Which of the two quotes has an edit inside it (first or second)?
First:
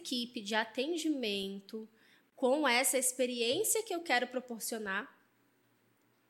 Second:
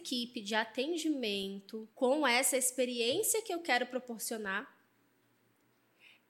second